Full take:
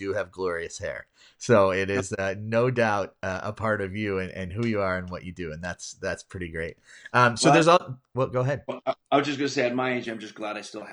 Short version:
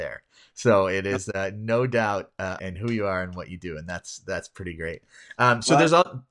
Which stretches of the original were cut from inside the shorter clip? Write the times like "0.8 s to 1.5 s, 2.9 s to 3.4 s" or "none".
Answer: 3.4 s to 4.3 s